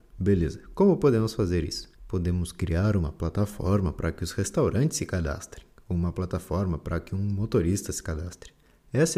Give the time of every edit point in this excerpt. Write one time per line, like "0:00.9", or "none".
0:02.0